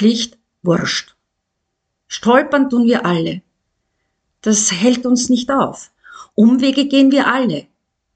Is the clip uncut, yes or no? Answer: yes